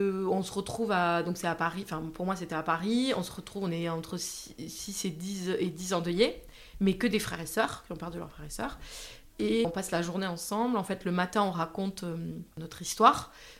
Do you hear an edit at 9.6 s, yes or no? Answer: yes